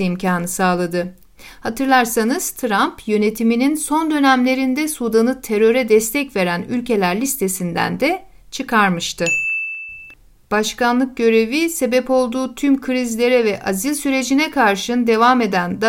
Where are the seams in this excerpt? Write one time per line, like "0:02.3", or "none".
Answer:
none